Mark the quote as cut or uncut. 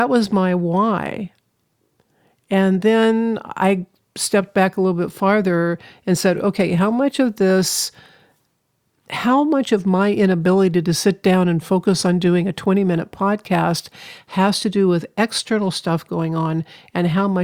uncut